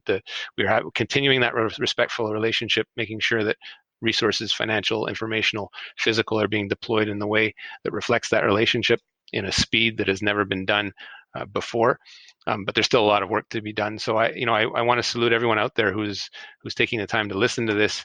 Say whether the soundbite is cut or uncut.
uncut